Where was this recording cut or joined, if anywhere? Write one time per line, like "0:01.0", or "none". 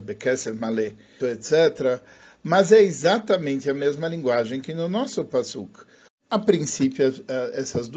0:01.2
0:06.1